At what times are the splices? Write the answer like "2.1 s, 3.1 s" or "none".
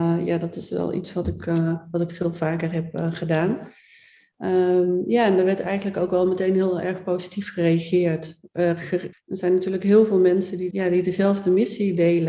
9.1 s, 10.7 s